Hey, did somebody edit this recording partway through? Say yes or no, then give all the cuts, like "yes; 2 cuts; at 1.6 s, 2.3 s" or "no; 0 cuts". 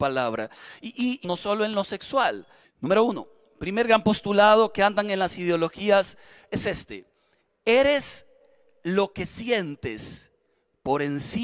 yes; 2 cuts; at 1.2 s, 2.6 s